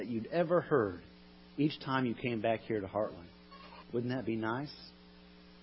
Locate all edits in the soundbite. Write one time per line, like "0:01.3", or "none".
0:03.8